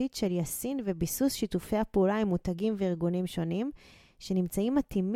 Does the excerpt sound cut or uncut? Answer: uncut